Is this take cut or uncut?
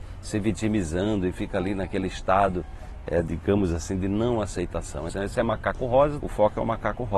cut